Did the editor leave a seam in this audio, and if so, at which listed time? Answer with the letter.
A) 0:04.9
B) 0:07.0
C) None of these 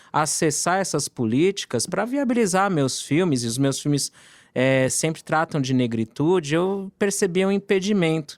C